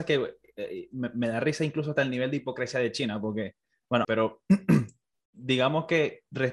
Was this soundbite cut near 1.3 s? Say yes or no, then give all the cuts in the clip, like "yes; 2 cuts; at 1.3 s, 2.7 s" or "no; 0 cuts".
no; 1 cut; at 4.0 s